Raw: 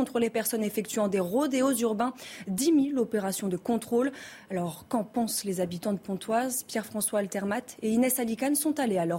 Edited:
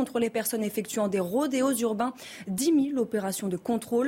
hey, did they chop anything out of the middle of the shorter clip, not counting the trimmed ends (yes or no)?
no